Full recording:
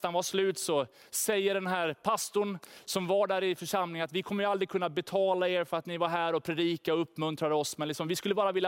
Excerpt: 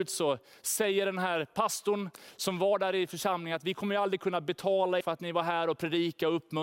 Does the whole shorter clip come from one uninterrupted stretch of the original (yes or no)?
no